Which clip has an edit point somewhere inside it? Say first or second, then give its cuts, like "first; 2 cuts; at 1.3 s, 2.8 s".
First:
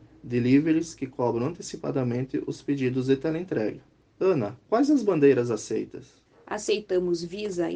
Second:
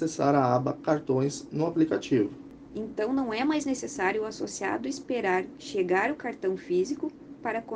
second; 1 cut; at 2.7 s